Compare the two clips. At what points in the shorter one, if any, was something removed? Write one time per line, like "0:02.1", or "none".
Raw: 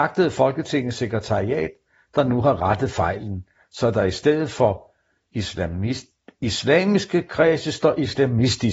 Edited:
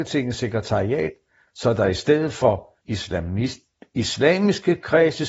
0:01.5
0:02.8

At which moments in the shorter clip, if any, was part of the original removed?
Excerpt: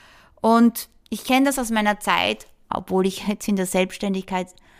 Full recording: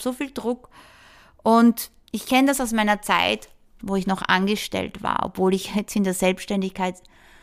0:02.7

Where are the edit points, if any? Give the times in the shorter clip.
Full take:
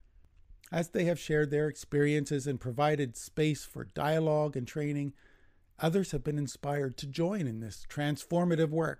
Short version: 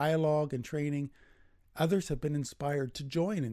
none

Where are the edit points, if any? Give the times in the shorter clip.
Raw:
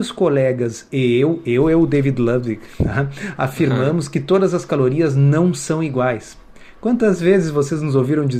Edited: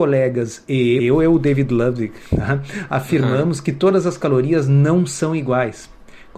0:01.0

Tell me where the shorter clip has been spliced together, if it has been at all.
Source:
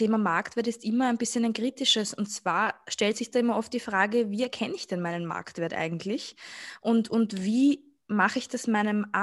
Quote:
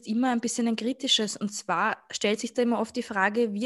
none

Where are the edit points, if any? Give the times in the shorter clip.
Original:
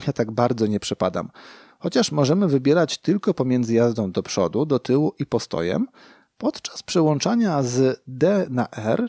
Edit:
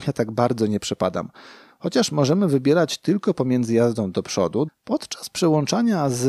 0:04.7

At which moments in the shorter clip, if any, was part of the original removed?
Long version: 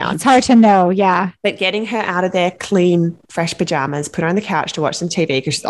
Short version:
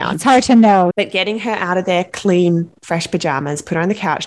0:00.9

